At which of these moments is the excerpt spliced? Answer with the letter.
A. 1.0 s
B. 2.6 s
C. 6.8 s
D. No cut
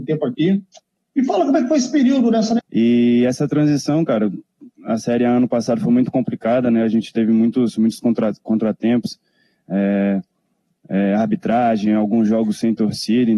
B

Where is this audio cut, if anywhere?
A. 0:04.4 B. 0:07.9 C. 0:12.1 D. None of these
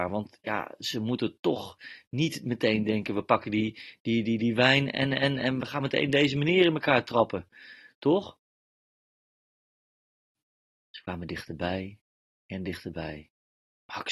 D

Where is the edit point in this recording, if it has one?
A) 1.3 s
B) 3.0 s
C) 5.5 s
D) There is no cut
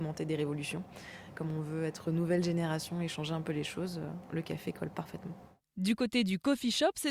A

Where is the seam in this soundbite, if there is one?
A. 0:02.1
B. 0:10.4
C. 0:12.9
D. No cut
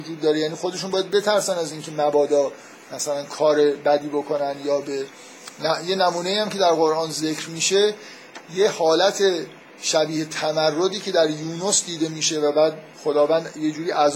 C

